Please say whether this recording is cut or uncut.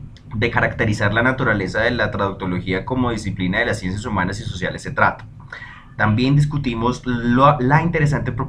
uncut